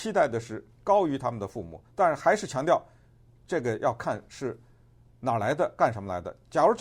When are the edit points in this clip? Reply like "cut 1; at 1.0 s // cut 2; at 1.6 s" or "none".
none